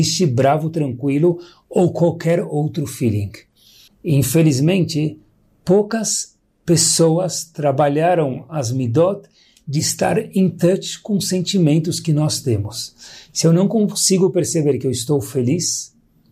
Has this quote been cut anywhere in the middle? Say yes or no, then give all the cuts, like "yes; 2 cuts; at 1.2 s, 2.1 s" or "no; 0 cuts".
yes; 1 cut; at 3.9 s